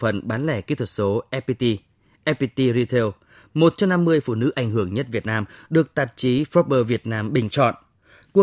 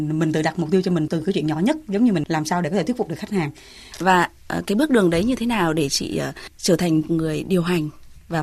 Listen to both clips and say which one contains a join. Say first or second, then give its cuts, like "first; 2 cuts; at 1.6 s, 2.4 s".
second; 1 cut; at 3.9 s